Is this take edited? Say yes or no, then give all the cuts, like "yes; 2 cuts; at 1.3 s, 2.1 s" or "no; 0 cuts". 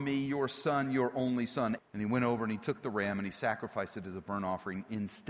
yes; 1 cut; at 1.8 s